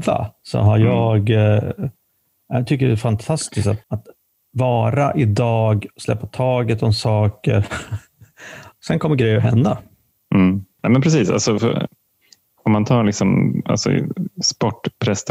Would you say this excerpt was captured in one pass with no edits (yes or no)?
no